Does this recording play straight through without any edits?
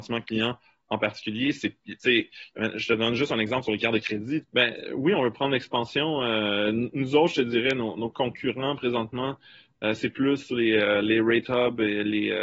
no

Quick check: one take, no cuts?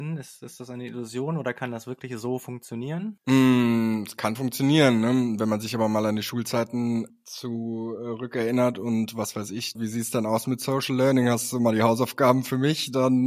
no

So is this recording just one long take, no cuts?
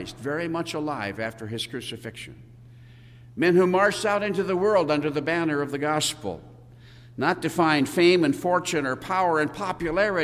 yes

